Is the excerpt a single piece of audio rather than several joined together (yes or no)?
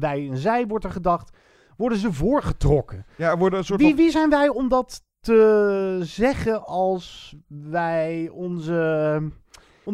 yes